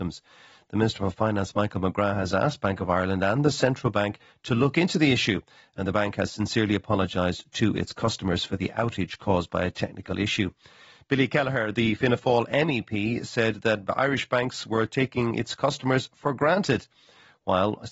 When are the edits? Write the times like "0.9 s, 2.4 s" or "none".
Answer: none